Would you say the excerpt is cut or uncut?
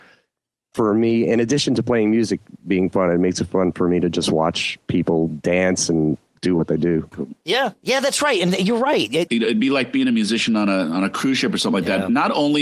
cut